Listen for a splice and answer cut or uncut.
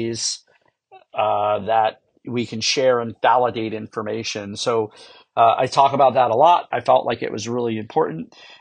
cut